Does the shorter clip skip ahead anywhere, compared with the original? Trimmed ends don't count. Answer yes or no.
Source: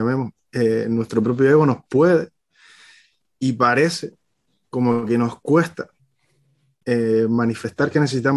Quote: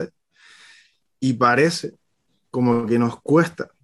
no